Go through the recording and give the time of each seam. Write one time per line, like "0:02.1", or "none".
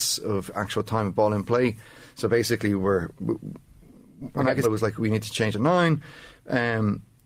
0:02.1
0:04.6

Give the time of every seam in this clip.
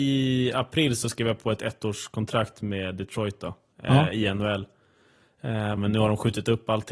0:05.8

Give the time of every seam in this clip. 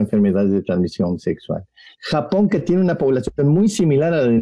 0:01.9

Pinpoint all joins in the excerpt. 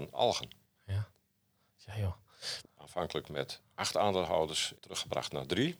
0:02.6
0:04.7

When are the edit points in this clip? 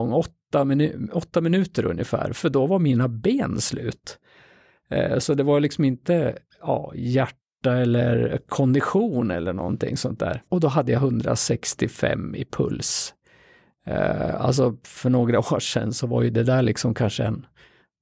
0:10.5

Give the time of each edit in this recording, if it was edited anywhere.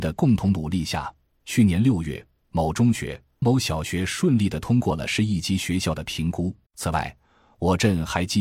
0:03.4
0:06.7

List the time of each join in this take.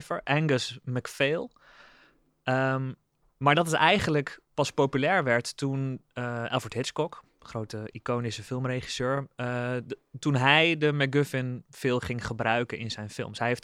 none

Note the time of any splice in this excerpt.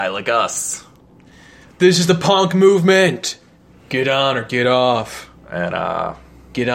none

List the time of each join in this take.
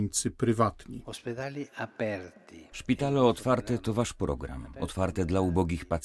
none

